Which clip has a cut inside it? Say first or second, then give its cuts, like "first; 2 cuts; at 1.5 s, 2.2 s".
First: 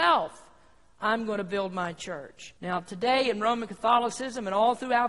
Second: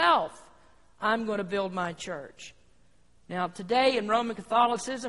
first; 1 cut; at 2.6 s